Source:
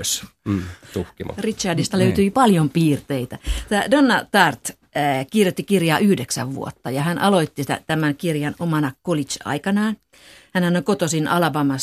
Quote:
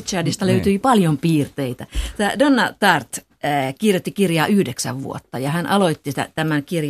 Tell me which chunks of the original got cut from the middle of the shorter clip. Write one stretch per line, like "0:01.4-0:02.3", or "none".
none